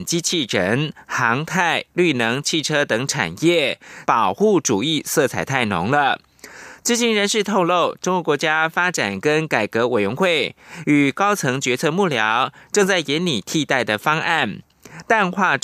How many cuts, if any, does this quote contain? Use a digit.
1